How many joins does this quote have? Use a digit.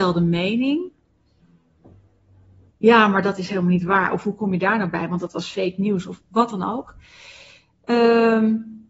1